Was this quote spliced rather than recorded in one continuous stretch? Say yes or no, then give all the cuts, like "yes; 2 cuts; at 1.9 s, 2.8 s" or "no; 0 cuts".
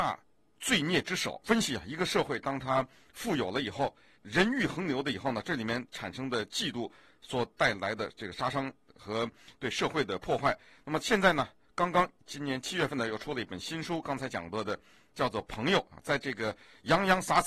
no; 0 cuts